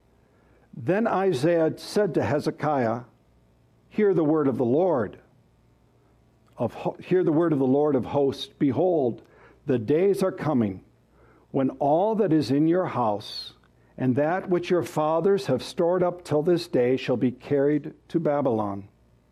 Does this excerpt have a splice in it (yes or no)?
no